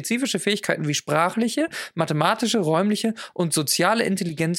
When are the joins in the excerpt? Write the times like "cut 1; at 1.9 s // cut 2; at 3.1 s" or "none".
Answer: none